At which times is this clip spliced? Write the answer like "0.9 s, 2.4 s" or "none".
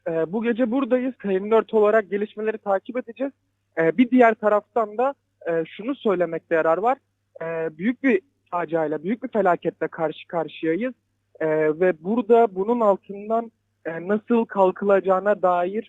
none